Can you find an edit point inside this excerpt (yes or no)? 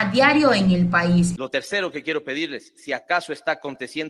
yes